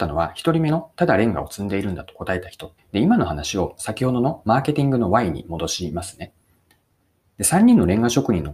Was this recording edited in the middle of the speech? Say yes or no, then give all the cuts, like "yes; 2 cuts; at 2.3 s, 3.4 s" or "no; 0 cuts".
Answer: yes; 1 cut; at 2.8 s